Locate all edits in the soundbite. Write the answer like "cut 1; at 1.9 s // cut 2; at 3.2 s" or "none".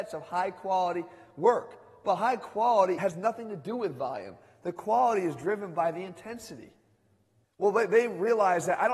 cut 1; at 7.4 s